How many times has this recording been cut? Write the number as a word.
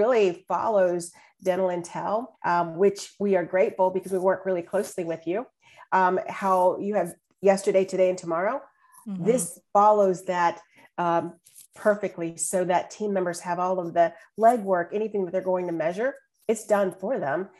one